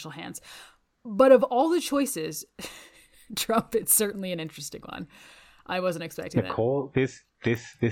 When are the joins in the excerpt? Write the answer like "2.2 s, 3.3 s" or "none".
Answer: none